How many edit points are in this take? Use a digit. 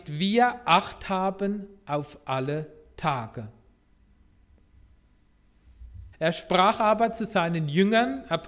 1